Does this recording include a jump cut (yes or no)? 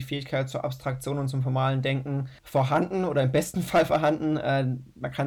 yes